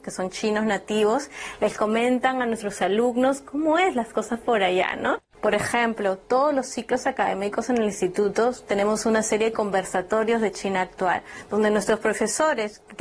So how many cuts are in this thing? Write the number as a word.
one